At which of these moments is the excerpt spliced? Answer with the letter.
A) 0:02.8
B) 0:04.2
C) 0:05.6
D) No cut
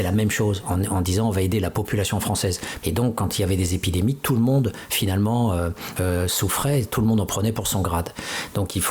A